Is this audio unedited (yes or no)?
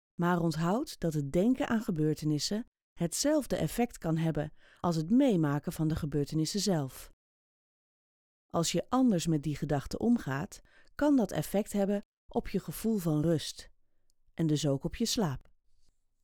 yes